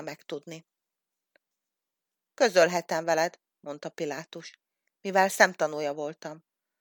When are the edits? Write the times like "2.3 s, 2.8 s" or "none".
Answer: none